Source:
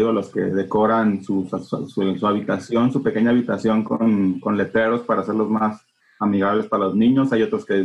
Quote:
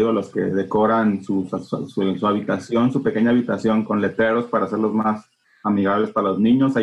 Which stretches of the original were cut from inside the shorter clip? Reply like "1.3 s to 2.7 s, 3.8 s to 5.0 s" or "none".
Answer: 3.8 s to 4.4 s